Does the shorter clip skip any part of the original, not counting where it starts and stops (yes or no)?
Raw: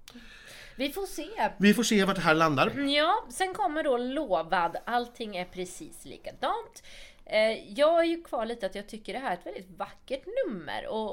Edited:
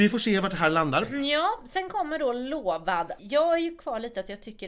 yes